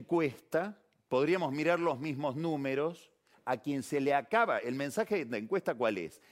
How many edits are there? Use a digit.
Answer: 1